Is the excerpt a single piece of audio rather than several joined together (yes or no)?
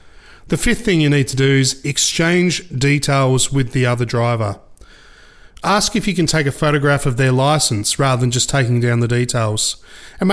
yes